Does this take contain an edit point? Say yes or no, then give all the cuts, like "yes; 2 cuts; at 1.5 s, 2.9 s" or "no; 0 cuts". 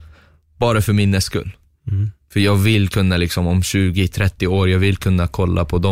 no; 0 cuts